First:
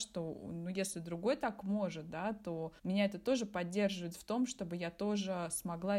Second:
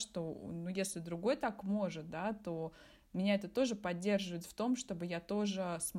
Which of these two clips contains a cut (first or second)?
first